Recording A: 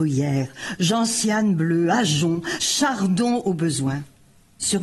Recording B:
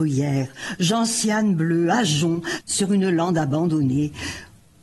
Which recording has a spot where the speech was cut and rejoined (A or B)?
B